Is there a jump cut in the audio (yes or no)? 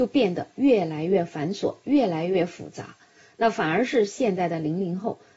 no